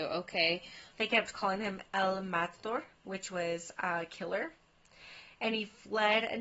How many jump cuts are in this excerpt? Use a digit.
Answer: 1